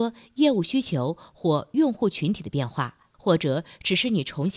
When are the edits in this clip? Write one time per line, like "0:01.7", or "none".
none